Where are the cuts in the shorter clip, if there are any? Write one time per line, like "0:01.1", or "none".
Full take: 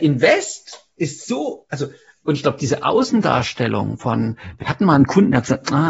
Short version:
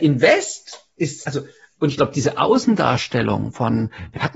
0:01.2